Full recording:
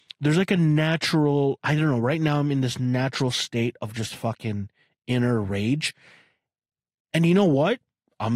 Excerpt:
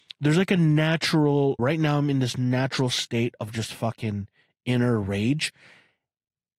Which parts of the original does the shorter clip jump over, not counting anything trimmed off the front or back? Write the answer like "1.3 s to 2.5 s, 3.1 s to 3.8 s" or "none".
1.6 s to 2.0 s